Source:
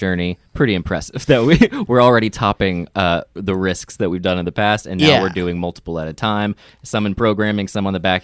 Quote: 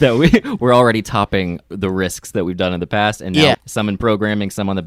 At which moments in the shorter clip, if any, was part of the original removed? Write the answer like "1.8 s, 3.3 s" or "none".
1.6 s, 3.5 s